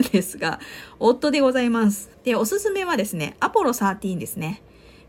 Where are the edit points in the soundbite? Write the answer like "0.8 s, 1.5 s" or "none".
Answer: 2.1 s